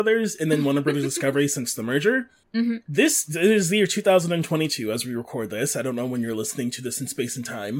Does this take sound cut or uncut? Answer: cut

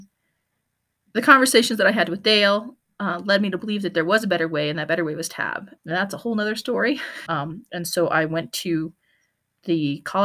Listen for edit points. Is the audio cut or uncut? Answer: cut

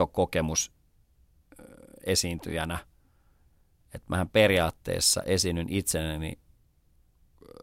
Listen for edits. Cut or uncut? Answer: uncut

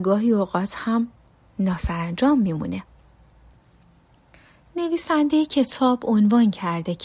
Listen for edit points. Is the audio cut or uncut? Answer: uncut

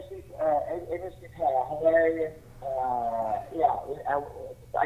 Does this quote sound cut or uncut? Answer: uncut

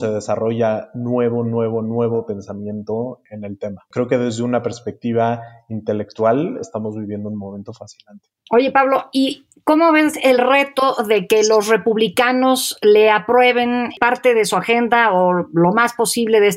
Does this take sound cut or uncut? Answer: uncut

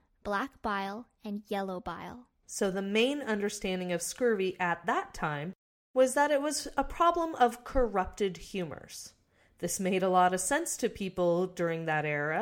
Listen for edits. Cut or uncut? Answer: uncut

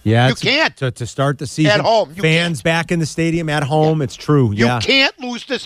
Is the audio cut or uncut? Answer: uncut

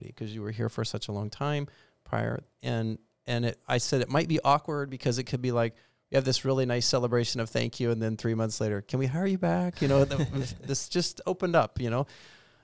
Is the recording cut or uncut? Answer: uncut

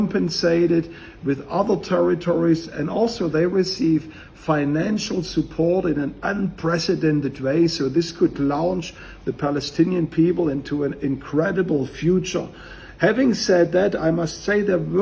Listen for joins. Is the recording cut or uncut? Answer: uncut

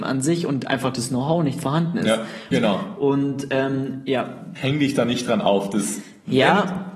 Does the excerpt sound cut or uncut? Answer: cut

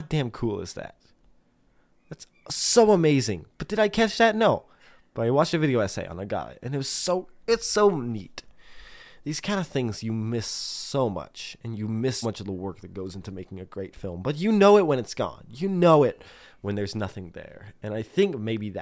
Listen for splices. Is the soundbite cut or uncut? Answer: cut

